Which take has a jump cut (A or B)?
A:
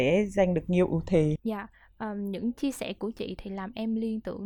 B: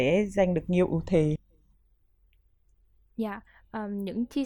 A